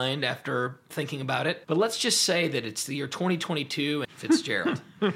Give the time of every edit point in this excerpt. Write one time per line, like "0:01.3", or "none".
0:01.6
0:04.0